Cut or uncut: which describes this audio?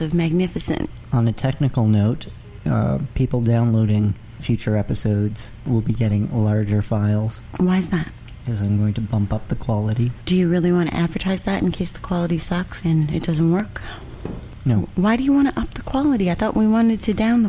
uncut